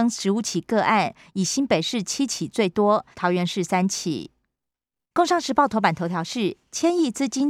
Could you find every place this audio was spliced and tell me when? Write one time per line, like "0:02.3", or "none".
0:03.1
0:05.1